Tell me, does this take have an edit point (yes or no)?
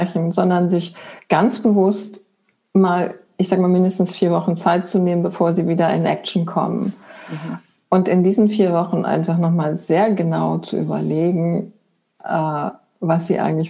no